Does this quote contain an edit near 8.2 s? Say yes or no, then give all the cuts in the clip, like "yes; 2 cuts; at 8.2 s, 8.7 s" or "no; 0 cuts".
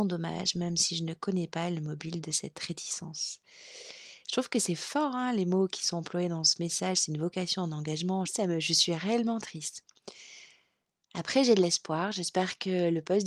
yes; 1 cut; at 8.2 s